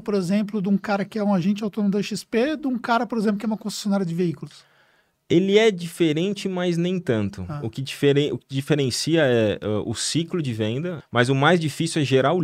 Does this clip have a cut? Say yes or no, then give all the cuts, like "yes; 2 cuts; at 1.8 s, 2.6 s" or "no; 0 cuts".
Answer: yes; 1 cut; at 11.0 s